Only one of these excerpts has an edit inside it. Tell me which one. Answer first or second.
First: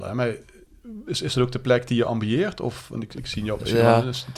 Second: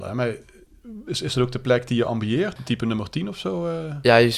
second